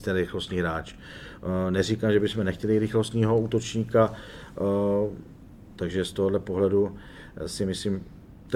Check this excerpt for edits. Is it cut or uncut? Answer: uncut